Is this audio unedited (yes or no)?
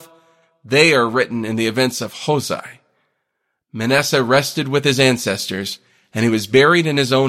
yes